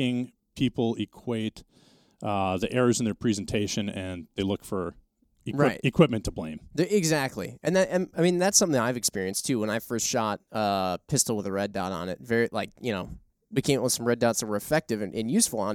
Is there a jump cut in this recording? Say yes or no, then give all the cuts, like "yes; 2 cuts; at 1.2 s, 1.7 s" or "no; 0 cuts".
no; 0 cuts